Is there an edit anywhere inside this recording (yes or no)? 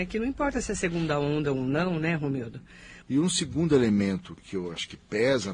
yes